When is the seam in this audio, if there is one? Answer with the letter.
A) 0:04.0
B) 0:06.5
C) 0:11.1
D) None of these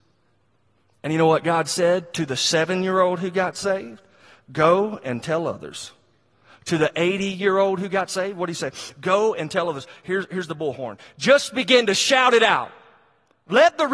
D